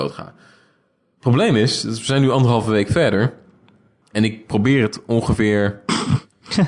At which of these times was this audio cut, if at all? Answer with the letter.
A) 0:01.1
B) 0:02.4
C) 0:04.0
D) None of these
C